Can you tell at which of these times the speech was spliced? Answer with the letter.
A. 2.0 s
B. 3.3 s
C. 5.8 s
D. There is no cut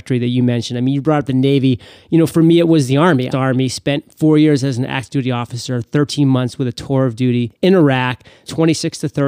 B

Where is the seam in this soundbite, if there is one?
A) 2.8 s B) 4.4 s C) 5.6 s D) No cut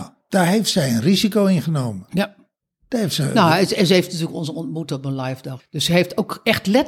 C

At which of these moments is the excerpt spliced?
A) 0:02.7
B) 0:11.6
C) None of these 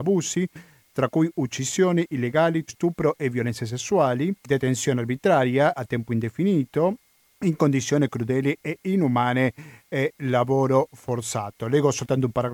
A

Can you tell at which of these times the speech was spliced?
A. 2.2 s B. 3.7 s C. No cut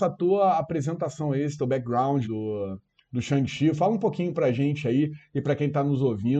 A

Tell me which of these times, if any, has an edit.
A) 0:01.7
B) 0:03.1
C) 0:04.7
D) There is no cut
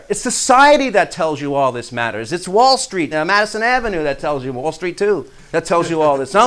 B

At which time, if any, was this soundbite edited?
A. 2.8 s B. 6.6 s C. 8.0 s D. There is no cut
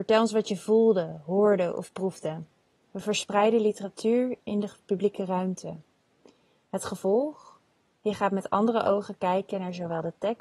A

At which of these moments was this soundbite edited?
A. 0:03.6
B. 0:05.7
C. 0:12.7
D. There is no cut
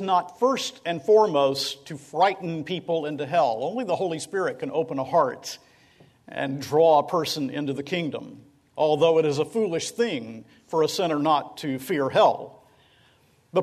D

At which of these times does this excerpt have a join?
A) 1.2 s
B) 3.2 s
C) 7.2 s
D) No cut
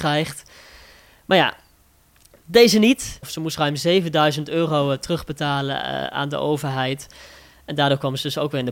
B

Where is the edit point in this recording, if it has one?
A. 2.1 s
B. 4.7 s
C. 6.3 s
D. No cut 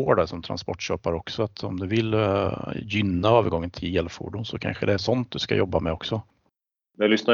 D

